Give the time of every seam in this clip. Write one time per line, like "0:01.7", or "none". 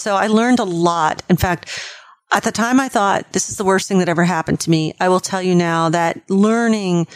none